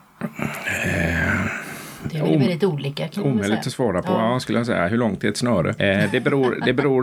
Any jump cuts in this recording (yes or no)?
yes